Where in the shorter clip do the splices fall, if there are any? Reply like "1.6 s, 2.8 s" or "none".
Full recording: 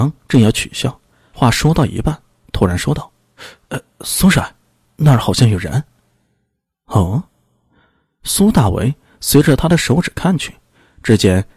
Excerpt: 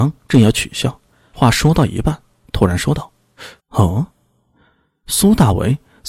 3.6 s